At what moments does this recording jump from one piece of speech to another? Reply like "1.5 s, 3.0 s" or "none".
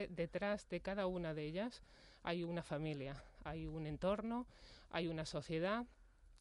none